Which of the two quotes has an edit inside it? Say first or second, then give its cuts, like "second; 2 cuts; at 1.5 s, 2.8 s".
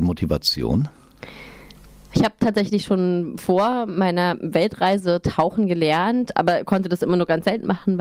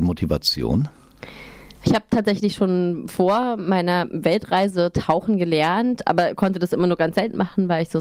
second; 1 cut; at 1.8 s